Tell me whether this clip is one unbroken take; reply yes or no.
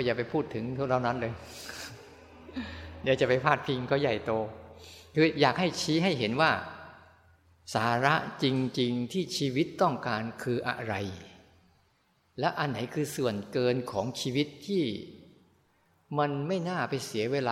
yes